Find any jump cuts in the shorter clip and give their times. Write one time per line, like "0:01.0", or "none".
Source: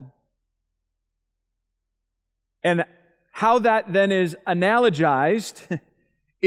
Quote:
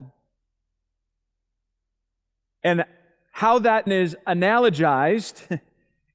0:03.9